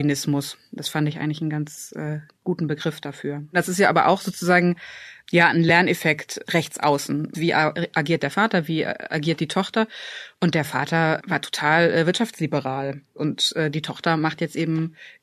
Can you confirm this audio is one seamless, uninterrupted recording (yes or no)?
no